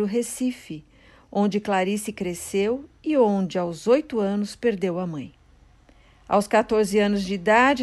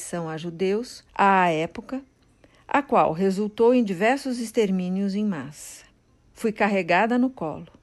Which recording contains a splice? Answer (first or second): second